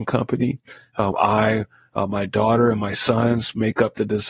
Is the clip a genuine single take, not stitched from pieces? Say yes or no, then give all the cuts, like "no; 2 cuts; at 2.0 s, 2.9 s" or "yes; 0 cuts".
no; 1 cut; at 1.1 s